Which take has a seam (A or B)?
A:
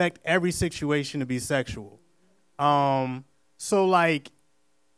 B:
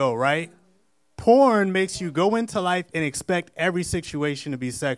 B